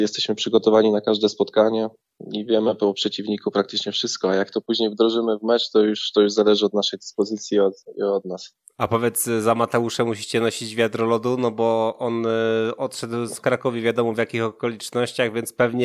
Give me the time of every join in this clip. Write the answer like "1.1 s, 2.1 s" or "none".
none